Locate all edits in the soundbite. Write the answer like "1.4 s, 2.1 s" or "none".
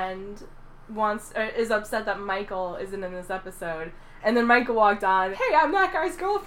4.2 s, 5.3 s